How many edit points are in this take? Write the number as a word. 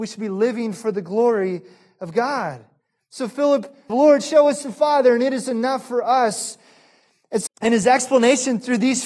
two